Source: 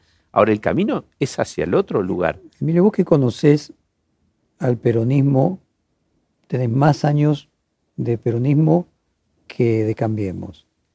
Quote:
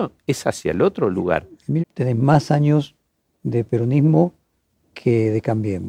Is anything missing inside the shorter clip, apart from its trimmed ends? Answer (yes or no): yes